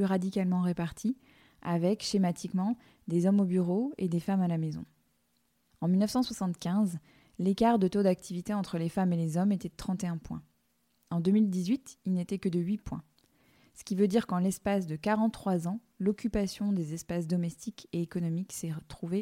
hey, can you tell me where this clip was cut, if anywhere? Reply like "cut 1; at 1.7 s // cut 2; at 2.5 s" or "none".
cut 1; at 5.7 s